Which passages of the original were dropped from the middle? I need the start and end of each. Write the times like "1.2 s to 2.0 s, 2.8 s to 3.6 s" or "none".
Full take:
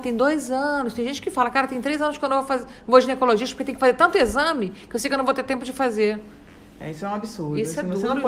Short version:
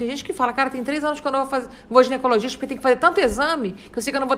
none